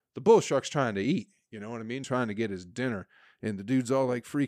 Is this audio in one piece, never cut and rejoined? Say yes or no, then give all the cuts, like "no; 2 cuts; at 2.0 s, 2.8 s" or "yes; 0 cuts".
yes; 0 cuts